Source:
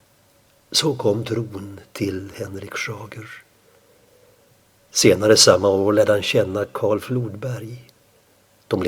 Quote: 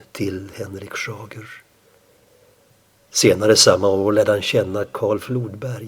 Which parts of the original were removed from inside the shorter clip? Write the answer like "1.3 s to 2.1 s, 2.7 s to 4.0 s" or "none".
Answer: none